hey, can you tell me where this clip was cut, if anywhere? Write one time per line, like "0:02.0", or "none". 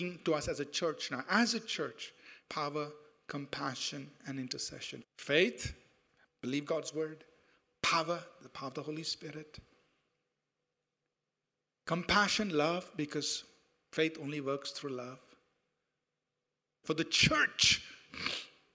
0:02.5
0:05.0
0:16.8